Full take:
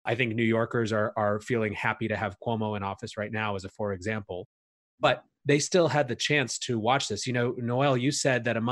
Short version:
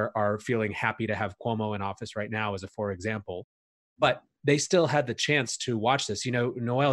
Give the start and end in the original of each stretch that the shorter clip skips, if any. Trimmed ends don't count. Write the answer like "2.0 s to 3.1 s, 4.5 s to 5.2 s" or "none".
none